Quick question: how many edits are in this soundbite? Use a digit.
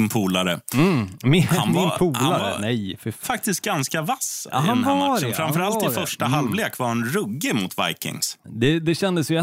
2